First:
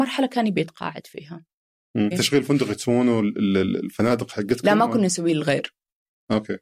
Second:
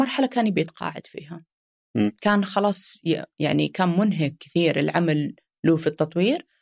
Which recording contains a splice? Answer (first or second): first